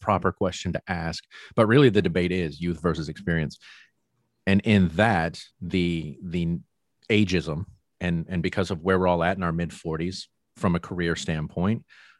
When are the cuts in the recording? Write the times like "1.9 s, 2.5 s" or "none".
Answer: 5.5 s